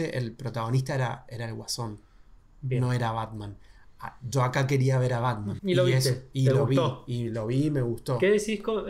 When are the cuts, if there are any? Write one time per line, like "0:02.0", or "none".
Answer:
0:05.6